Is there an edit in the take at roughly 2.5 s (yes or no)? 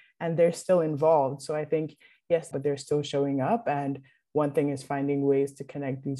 yes